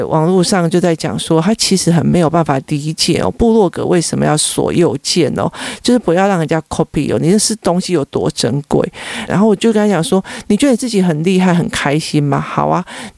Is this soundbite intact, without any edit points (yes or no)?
no